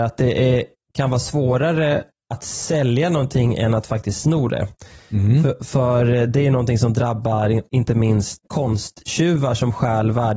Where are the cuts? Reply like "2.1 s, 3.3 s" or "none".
8.4 s